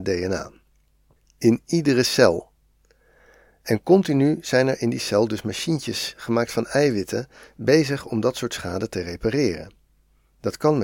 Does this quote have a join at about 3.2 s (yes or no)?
no